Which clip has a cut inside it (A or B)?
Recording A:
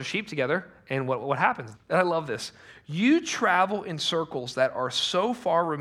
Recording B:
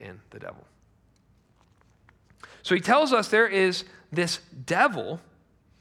A